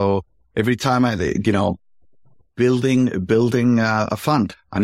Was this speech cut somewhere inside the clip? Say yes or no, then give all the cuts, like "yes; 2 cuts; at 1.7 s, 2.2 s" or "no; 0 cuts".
no; 0 cuts